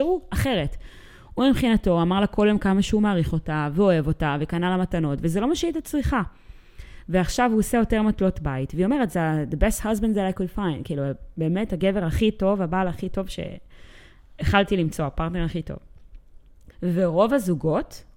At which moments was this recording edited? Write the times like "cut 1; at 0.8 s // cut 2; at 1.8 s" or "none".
cut 1; at 16.7 s